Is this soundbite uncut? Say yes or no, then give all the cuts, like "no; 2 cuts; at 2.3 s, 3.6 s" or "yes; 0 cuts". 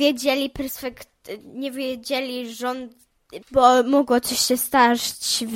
no; 1 cut; at 3.4 s